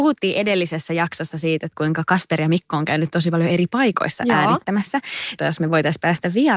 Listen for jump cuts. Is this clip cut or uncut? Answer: cut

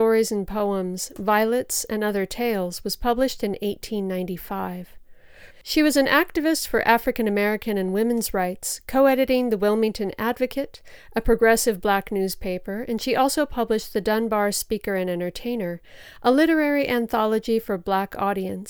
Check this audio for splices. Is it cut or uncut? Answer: cut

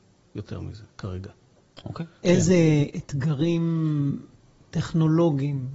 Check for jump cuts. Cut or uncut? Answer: cut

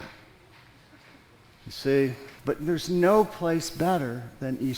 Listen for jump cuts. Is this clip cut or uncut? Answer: cut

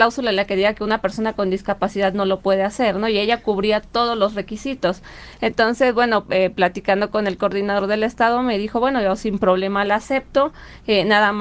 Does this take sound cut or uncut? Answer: uncut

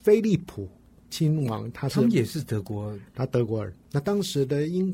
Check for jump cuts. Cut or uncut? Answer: cut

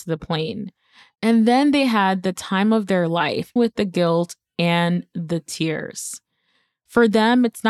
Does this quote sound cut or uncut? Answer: cut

